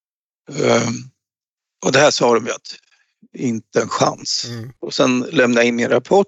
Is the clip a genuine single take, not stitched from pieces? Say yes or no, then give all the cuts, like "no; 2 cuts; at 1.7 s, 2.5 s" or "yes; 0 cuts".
no; 1 cut; at 4.8 s